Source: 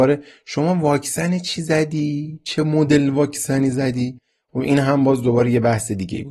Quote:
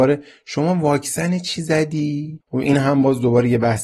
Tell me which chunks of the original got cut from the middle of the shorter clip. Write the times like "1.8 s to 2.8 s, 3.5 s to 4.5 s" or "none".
2.4 s to 4.4 s